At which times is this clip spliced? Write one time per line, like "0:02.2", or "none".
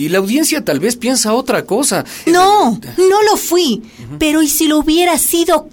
0:02.3